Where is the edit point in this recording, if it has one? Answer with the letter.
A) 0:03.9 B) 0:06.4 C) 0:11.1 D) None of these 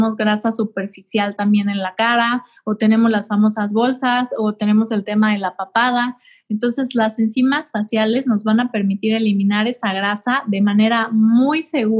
D